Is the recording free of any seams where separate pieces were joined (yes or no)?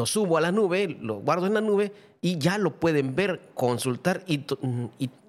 yes